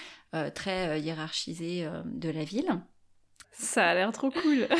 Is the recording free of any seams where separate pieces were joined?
no; 1 cut; at 3.4 s

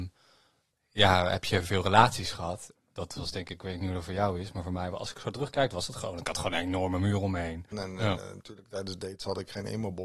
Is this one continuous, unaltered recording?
no; 2 cuts; at 2.8 s, 7.7 s

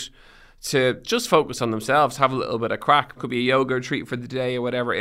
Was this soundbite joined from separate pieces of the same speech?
yes; 1 cut; at 3.2 s

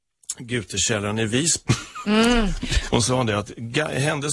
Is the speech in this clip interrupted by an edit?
yes; 2 cuts; at 1.7 s, 2.9 s

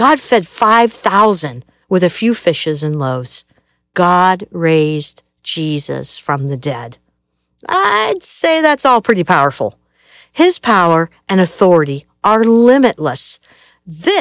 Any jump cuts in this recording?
no; 0 cuts

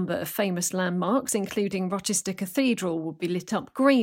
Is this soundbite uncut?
yes; 0 cuts

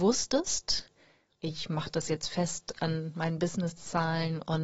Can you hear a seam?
yes; 1 cut; at 1.4 s

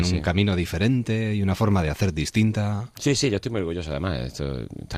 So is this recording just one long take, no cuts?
yes; 0 cuts

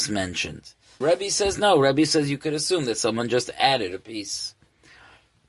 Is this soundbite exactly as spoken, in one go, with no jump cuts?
no; 1 cut; at 1.0 s

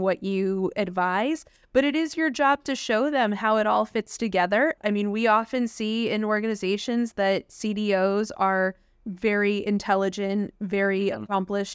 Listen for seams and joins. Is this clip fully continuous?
no; 1 cut; at 4.8 s

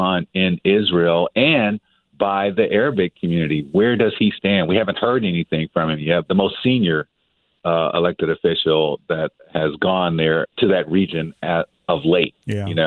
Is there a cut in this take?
yes; 2 cuts; at 6.3 s, 10.5 s

